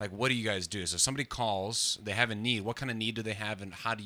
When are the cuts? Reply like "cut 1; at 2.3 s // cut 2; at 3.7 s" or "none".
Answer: none